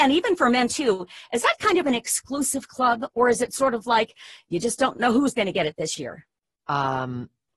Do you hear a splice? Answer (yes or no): no